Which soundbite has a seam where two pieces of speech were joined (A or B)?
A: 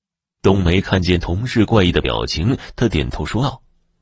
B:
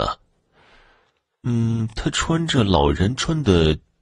A